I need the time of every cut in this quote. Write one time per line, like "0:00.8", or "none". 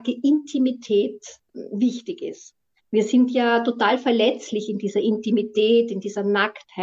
0:02.8

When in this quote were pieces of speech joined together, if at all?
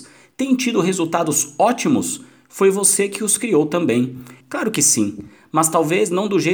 0:04.4

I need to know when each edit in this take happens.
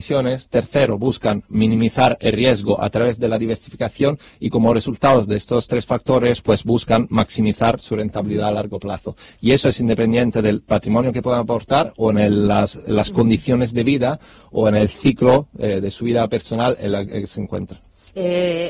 none

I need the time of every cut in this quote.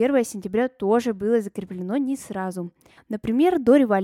0:03.0

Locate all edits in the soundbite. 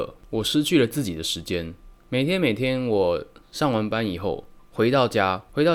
none

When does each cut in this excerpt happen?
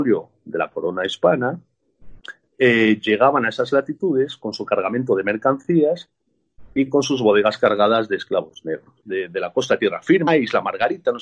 0:09.0
0:10.3

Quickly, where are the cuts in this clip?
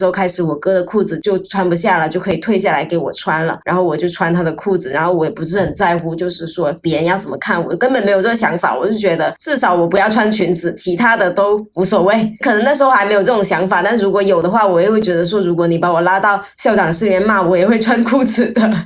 none

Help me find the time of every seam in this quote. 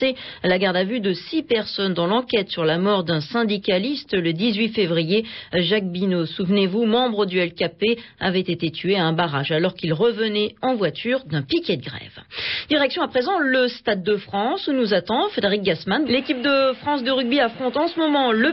0:16.0

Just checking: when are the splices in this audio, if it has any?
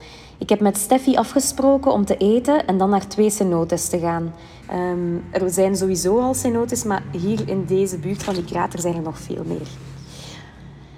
0:04.6

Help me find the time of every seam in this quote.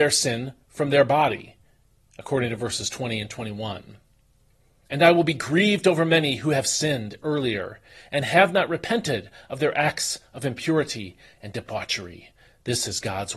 0:04.9
0:11.3

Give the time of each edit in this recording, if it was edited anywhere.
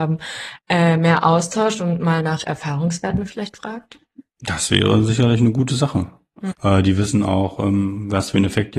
0:06.5

